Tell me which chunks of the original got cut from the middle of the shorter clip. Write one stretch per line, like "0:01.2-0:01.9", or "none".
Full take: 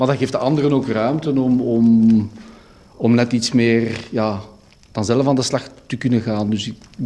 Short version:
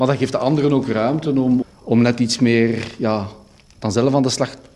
0:01.6-0:02.7